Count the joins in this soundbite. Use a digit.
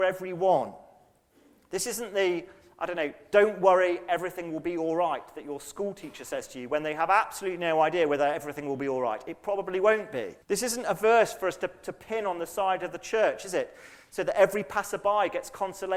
1